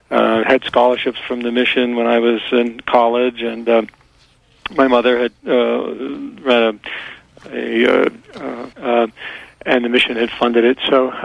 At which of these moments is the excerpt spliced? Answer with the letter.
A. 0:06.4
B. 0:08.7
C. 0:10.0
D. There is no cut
B